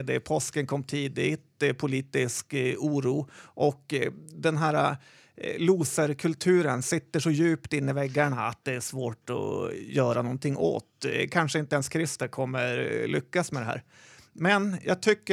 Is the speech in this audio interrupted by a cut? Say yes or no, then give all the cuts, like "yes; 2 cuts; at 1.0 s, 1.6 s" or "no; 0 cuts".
no; 0 cuts